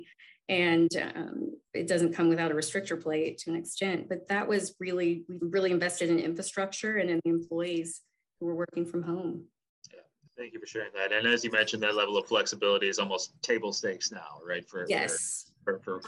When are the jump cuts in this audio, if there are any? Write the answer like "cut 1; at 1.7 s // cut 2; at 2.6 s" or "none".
cut 1; at 5.4 s